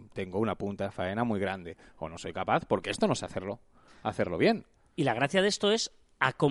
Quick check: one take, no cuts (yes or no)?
yes